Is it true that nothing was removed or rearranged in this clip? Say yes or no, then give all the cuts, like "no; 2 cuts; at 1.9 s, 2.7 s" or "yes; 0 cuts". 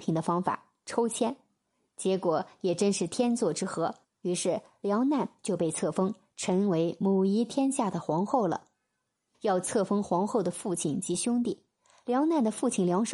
no; 2 cuts; at 4.0 s, 9.3 s